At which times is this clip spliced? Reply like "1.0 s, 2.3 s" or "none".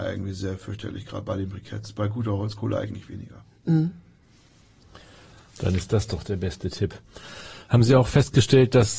none